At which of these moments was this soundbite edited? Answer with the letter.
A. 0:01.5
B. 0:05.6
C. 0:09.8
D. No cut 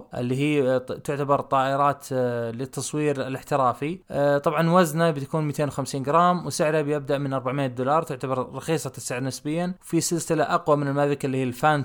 C